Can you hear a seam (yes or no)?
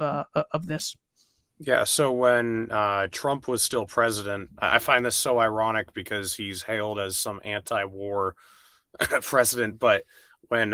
no